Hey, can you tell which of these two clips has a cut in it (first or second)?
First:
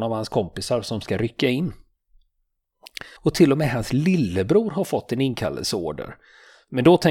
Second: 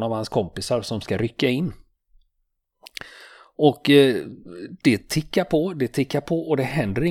first